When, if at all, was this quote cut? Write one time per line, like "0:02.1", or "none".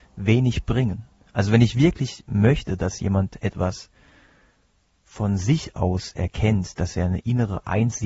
none